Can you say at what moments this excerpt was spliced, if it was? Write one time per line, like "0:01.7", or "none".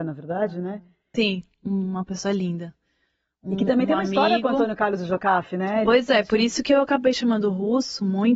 0:01.1